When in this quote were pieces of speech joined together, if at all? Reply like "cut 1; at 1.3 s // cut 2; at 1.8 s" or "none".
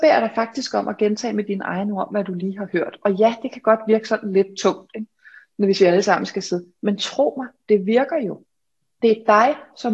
cut 1; at 8.8 s